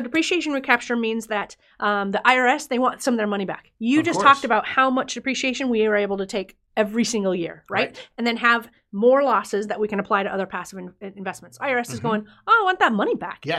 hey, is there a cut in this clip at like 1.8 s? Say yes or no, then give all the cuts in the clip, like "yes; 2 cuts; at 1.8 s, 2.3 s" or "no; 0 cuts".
no; 0 cuts